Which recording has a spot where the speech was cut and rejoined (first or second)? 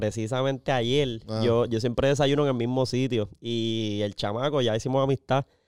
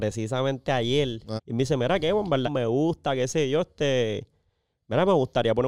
second